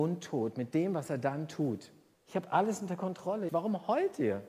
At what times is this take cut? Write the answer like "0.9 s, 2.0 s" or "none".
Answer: 2.1 s, 3.5 s